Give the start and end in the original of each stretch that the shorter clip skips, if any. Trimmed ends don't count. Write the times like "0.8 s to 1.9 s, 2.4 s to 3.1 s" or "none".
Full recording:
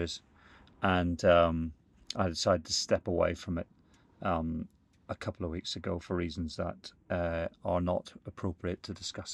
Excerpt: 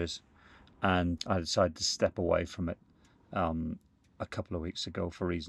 1.2 s to 2.1 s